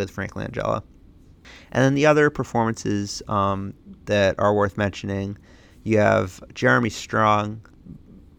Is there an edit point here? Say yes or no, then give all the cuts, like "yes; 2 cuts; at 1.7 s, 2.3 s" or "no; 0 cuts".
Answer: no; 0 cuts